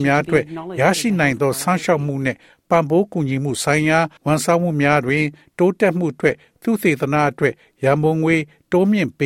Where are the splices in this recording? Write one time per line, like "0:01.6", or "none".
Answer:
0:04.2